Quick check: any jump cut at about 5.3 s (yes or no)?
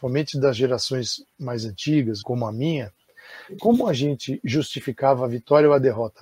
no